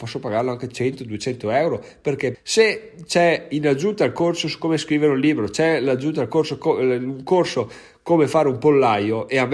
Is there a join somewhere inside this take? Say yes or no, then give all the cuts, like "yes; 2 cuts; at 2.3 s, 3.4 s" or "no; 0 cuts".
yes; 1 cut; at 2.3 s